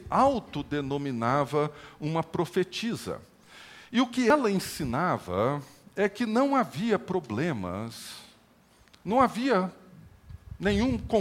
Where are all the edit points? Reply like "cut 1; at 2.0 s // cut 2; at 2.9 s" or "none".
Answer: none